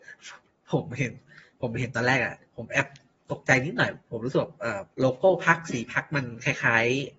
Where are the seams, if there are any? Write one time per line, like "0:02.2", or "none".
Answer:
0:02.4
0:04.9